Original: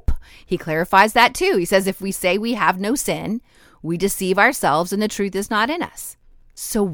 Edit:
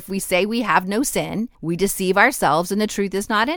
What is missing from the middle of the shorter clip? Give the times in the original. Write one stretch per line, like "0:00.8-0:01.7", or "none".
0:03.5-0:03.8